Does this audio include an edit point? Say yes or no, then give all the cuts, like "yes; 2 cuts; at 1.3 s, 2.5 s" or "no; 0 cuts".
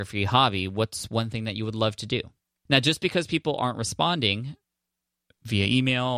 yes; 1 cut; at 2.7 s